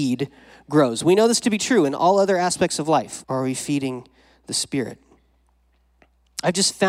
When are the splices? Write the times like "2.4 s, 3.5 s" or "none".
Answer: 3.2 s